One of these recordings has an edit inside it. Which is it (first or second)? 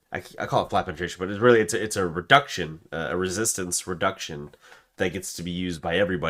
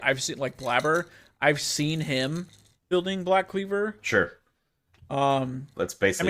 first